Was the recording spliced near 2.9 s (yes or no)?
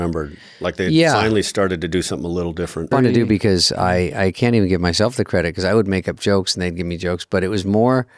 yes